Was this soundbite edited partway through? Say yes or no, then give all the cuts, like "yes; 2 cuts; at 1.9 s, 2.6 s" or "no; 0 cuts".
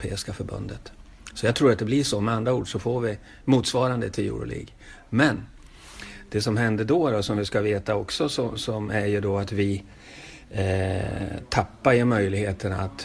no; 0 cuts